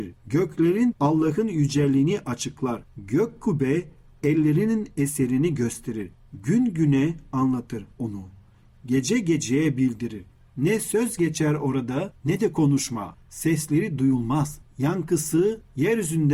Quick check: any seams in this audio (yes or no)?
no